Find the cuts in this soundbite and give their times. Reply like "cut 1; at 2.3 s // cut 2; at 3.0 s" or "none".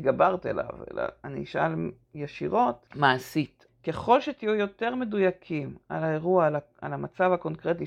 cut 1; at 3.7 s